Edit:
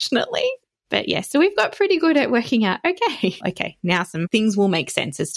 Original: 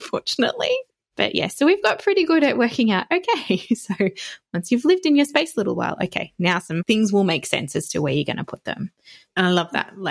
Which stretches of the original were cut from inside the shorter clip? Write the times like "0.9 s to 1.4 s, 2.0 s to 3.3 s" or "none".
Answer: 3.7 s to 6.0 s